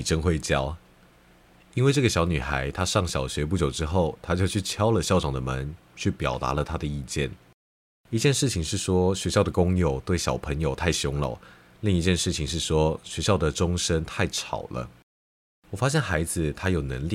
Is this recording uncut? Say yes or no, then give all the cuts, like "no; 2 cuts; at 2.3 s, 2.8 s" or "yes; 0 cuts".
yes; 0 cuts